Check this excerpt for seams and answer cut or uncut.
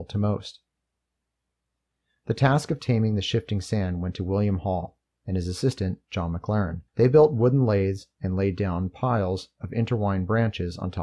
cut